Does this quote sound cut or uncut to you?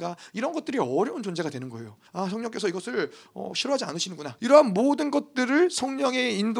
cut